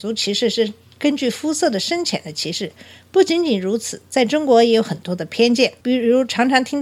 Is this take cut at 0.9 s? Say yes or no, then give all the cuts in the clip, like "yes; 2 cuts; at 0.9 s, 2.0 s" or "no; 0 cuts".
no; 0 cuts